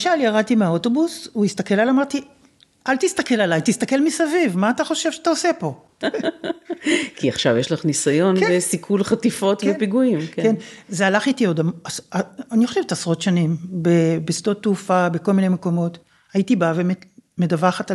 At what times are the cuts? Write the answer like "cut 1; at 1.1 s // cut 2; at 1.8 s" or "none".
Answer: cut 1; at 6.0 s